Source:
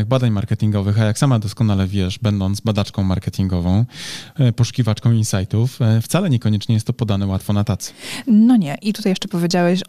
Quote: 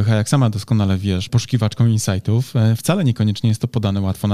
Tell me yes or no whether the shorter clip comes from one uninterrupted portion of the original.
no